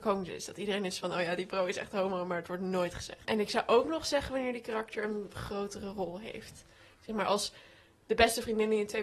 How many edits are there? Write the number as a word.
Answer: zero